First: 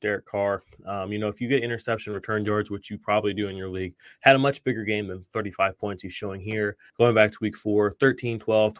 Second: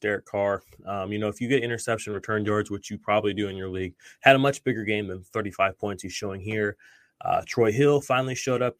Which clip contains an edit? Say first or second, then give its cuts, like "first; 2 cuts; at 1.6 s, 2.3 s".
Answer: first; 1 cut; at 6.9 s